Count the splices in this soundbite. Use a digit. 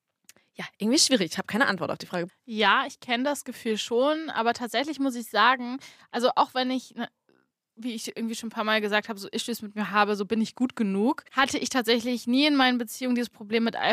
2